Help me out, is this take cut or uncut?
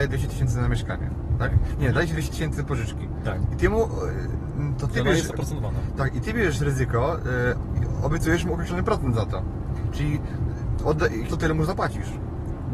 cut